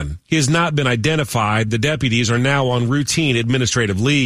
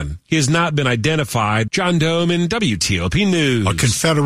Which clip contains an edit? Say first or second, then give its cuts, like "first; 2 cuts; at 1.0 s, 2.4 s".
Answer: second; 1 cut; at 1.7 s